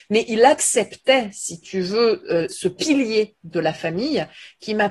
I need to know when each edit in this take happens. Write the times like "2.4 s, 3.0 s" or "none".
2.5 s

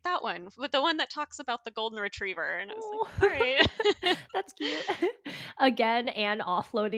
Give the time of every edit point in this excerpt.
none

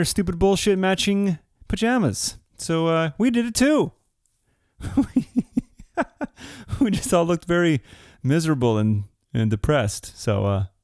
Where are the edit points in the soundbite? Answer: 2.5 s

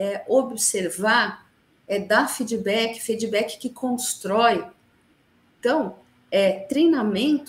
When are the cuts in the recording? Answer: 5.6 s

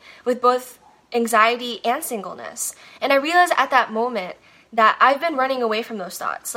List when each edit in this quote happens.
3.0 s

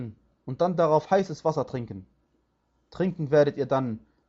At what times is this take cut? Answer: none

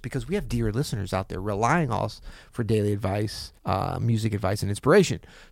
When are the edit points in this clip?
3.6 s

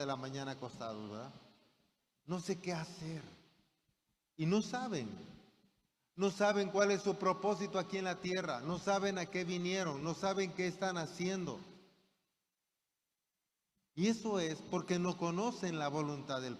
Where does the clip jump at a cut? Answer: none

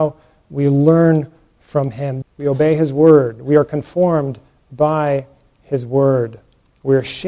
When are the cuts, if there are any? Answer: 2.2 s

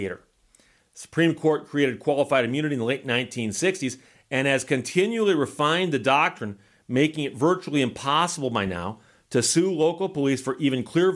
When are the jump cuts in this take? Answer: none

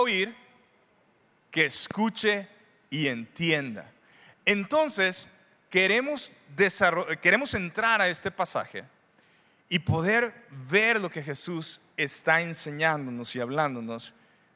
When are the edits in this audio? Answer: none

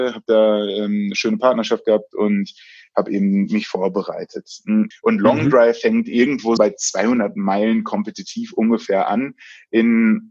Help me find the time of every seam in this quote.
4.9 s, 6.6 s

